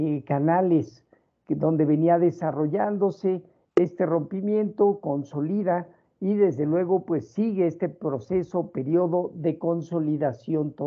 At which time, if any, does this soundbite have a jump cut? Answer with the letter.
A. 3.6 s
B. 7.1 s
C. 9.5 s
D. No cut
A